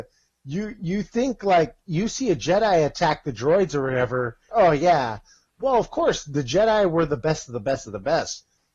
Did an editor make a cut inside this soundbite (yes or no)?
yes